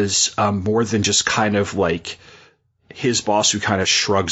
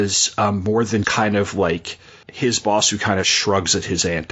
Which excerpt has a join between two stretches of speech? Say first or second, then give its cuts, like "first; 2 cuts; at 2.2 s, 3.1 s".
second; 2 cuts; at 1.0 s, 2.2 s